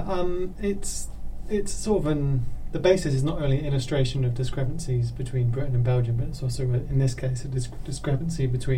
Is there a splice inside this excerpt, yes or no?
no